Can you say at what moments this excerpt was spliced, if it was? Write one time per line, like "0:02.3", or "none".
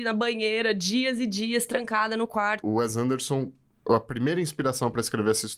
0:02.6